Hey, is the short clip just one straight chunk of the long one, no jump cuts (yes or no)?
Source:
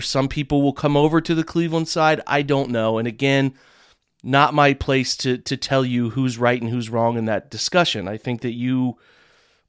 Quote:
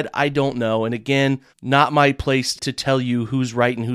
no